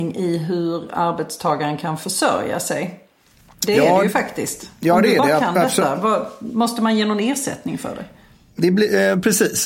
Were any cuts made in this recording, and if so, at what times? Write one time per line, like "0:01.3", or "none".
none